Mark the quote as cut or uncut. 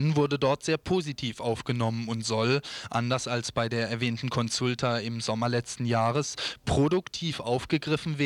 uncut